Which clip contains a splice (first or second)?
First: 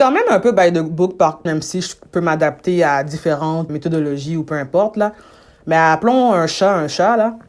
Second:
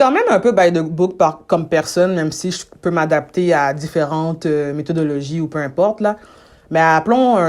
first